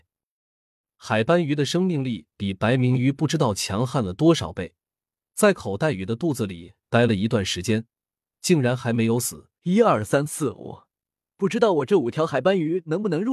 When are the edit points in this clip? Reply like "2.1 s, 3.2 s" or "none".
9.6 s